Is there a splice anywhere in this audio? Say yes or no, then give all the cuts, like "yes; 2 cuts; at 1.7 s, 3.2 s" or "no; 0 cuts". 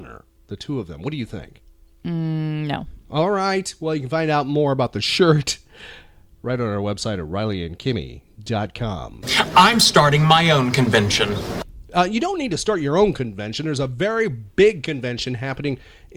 no; 0 cuts